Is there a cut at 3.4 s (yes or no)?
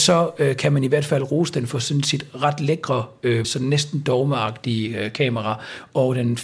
yes